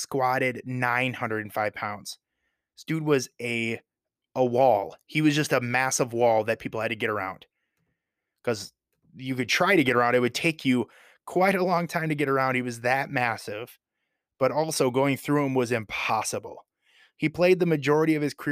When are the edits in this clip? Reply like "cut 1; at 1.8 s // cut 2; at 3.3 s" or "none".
none